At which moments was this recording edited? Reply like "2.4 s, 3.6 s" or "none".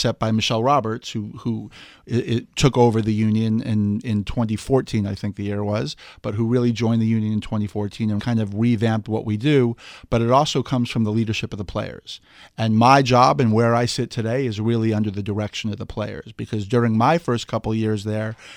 8.2 s